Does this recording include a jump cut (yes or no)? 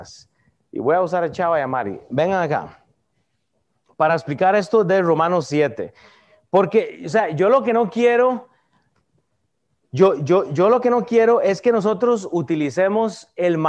no